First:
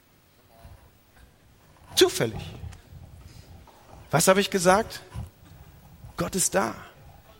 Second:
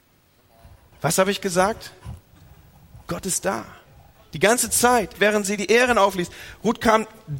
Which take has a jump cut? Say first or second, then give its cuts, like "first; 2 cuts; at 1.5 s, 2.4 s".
second; 2 cuts; at 0.9 s, 5.1 s